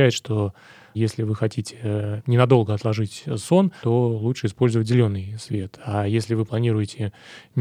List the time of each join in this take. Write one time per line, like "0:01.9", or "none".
0:03.8